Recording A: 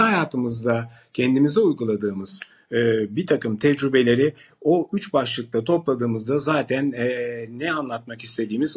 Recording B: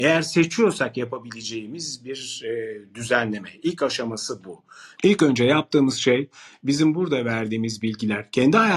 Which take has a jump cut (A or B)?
B